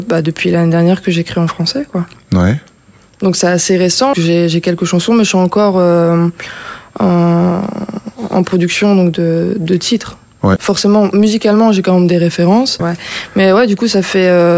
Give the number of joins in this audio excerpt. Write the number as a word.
three